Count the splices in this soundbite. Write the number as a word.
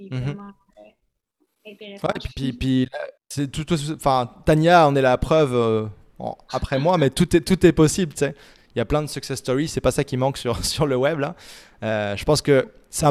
two